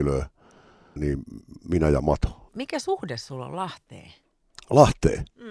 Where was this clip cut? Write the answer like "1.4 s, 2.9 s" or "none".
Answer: 1.0 s, 2.5 s